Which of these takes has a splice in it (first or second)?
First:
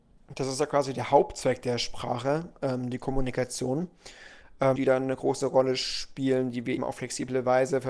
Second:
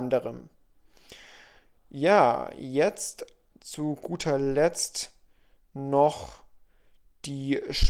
first